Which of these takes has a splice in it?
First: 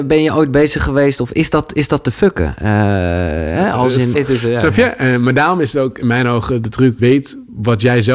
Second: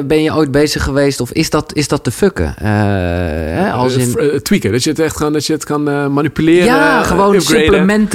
first; 2 cuts; at 4.1 s, 7.0 s

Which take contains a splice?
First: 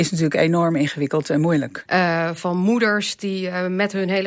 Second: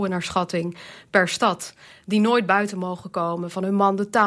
first; 1 cut; at 1.9 s

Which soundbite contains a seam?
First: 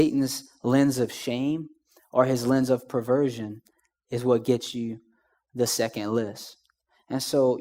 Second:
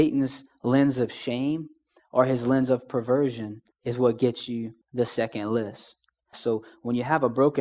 second; 3 cuts; at 3.7 s, 4.8 s, 6.3 s

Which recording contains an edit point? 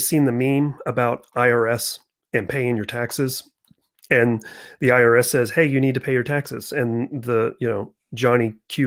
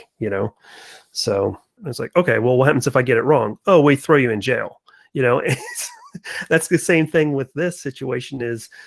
second; 1 cut; at 1.8 s

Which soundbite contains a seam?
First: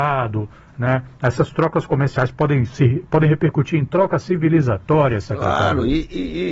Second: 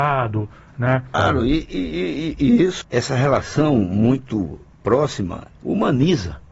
second; 2 cuts; at 1.1 s, 2.8 s

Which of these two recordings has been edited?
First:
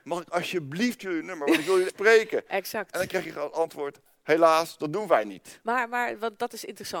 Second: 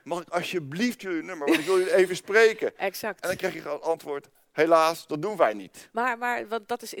first; 1 cut; at 1.9 s

